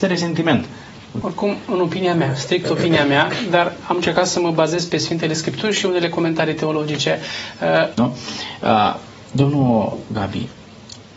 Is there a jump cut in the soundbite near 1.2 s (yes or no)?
yes